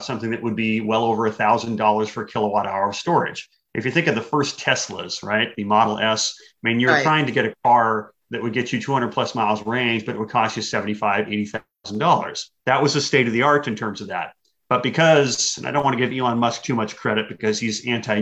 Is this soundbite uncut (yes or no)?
no